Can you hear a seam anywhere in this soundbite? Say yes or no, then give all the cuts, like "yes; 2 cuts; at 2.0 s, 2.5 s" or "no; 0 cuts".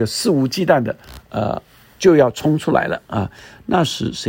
no; 0 cuts